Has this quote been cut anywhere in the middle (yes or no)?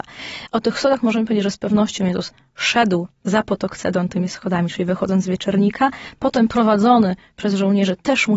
yes